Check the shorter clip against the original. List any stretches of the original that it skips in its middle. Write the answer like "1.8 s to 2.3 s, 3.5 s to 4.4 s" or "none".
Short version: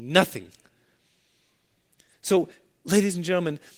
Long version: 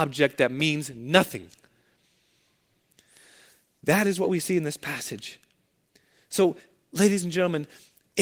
3.1 s to 6.2 s